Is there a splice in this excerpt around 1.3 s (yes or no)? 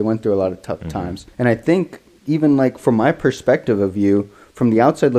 yes